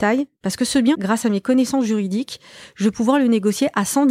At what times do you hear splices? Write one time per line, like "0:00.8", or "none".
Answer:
0:00.9